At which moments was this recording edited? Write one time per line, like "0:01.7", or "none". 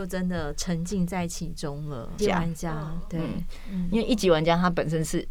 0:02.2